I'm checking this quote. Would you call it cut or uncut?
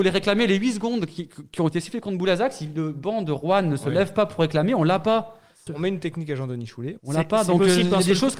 cut